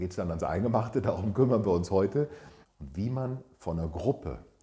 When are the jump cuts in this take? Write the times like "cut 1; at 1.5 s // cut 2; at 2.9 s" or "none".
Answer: cut 1; at 2.6 s